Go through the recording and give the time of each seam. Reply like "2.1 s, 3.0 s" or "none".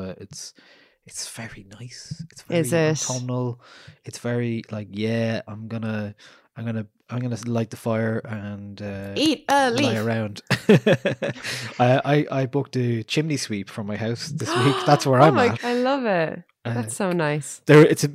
15.6 s